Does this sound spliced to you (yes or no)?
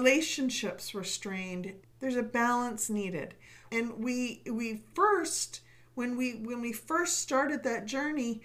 yes